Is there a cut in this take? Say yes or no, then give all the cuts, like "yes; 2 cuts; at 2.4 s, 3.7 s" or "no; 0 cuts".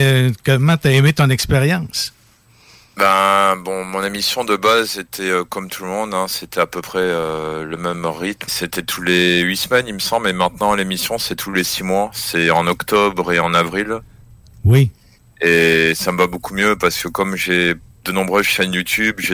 yes; 1 cut; at 8.5 s